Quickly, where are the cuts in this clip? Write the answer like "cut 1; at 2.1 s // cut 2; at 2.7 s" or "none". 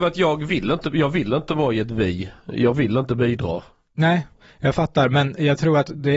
none